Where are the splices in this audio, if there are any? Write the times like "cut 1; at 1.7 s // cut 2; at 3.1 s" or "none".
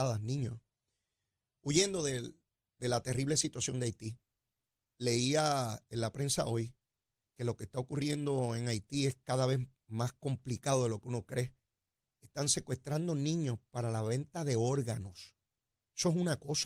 none